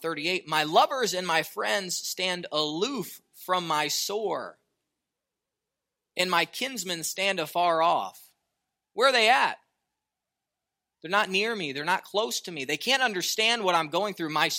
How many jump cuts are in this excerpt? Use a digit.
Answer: 0